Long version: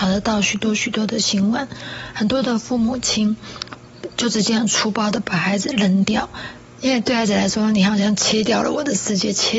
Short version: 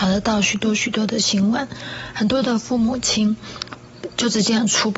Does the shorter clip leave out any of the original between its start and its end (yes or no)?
no